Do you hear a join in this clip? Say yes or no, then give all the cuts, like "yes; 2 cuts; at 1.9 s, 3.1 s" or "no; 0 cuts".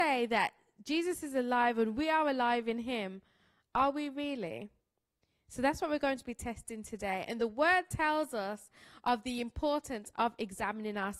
no; 0 cuts